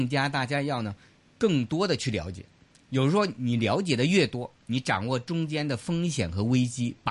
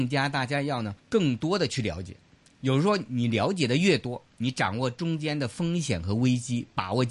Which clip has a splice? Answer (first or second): second